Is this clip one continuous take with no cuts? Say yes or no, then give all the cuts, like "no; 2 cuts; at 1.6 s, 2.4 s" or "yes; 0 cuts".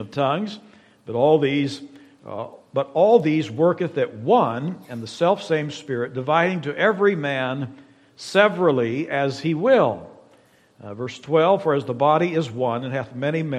yes; 0 cuts